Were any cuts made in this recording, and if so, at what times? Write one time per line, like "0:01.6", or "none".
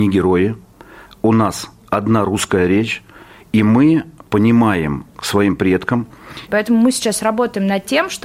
0:05.2
0:06.5